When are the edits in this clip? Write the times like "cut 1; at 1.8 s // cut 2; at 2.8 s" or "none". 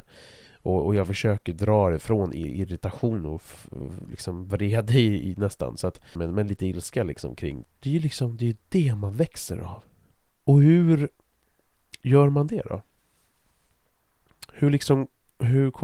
cut 1; at 6.1 s // cut 2; at 7.6 s // cut 3; at 10.3 s